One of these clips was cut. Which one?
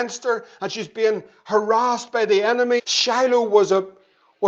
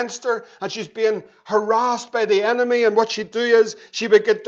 first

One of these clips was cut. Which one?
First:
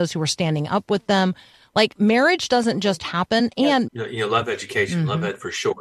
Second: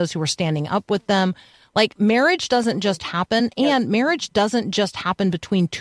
first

